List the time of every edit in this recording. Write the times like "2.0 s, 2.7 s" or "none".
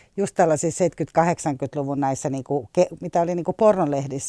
none